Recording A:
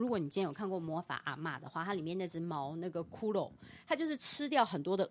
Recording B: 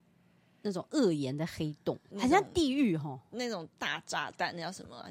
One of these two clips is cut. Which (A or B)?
B